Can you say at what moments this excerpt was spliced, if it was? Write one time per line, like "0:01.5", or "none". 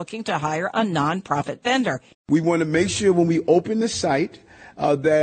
0:02.1